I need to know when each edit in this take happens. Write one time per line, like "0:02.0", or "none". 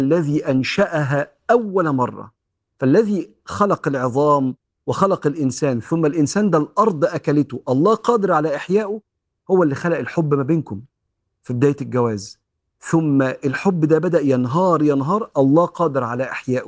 0:14.8